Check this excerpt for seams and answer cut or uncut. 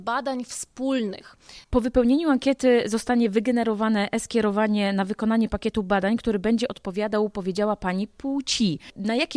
cut